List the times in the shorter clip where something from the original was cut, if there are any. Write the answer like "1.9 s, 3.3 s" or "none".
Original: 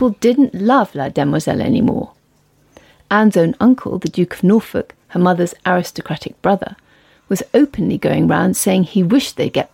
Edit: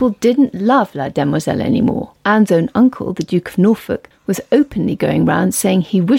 2.2 s, 4.1 s

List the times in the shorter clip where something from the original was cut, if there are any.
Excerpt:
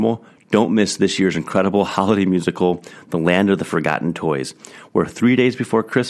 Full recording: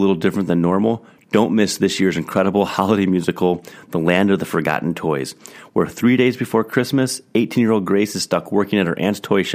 none

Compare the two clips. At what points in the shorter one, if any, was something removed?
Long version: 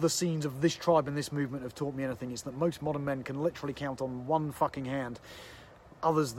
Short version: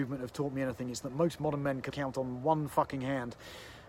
1.9 s

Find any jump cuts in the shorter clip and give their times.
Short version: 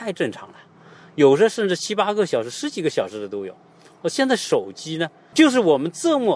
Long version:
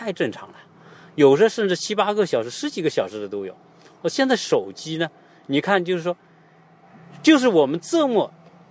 5.3 s

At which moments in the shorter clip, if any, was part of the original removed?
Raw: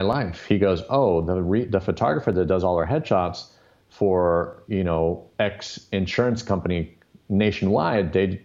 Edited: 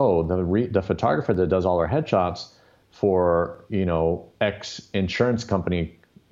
none

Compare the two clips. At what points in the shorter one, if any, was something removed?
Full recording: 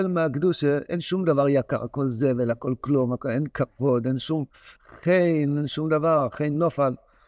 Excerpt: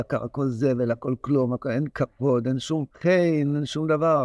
2.9 s

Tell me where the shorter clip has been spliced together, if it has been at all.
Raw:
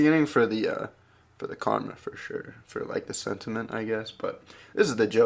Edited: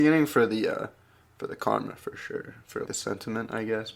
2.9 s

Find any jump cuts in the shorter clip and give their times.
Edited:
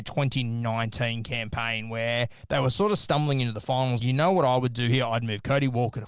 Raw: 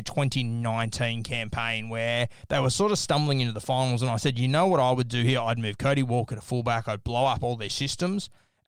4.0 s

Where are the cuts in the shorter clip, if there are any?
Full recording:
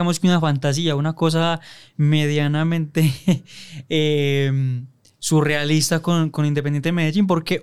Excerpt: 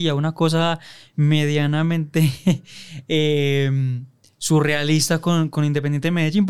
none

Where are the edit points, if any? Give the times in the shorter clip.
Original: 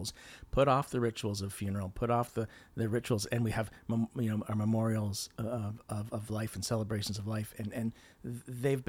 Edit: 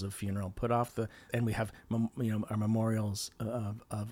1.3 s

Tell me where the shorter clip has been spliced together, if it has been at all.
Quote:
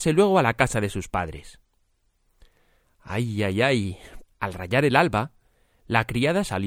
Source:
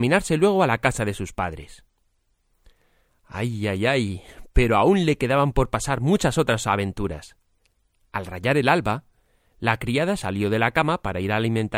4.2 s

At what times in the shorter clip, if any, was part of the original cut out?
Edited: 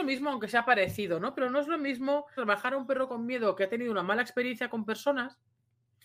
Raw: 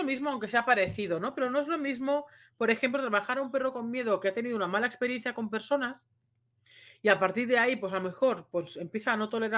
2.4 s

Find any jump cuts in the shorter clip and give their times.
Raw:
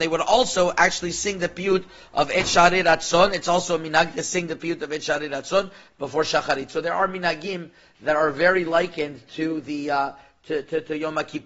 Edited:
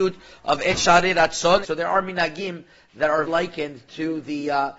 1.6 s, 3.3 s

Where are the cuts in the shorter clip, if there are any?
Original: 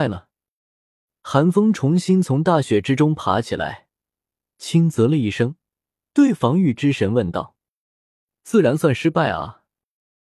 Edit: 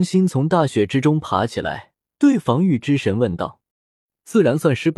2.2 s, 3.7 s

